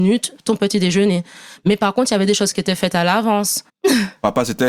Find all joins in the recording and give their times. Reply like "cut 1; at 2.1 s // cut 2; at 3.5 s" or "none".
cut 1; at 3.7 s